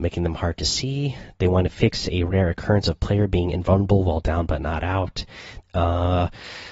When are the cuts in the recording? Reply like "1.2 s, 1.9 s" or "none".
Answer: 5.6 s